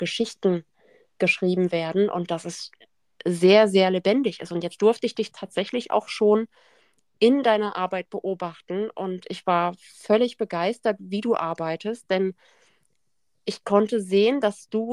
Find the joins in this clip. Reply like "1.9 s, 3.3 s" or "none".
none